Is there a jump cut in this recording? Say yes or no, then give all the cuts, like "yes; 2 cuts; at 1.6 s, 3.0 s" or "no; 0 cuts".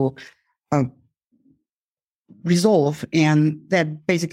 no; 0 cuts